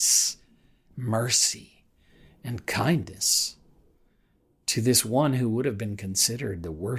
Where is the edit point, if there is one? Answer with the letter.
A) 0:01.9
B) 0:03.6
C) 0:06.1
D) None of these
D